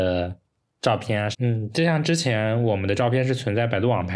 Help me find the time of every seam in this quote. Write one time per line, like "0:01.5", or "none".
0:01.3

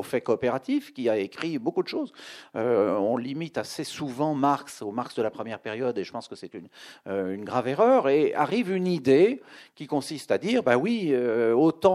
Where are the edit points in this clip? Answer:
none

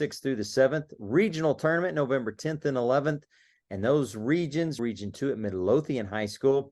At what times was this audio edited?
0:04.8

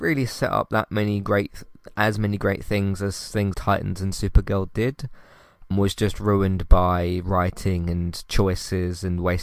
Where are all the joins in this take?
0:03.5
0:05.7

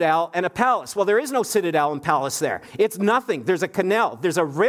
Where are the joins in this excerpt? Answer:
none

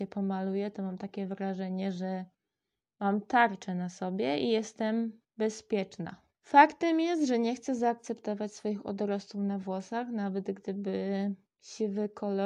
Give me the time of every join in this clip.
0:06.3

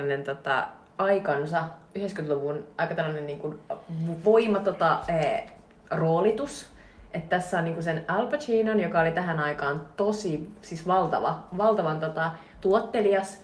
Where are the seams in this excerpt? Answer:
0:04.2

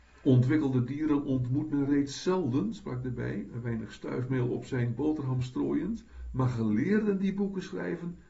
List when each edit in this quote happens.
none

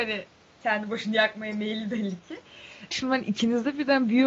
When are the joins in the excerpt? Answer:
0:02.9

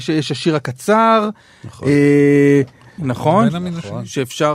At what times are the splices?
0:03.0

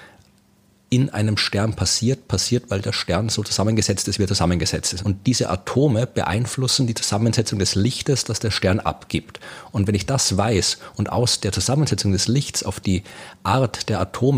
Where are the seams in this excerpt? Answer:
0:05.0

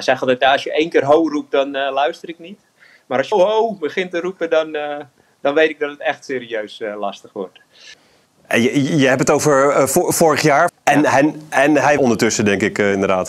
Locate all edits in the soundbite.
0:03.3
0:10.7
0:12.0

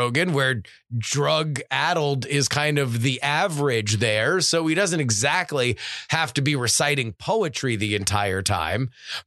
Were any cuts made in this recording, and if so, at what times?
none

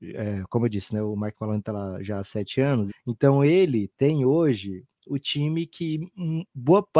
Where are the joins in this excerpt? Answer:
0:02.9

